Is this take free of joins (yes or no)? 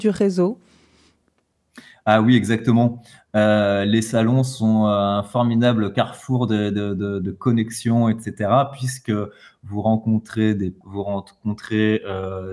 no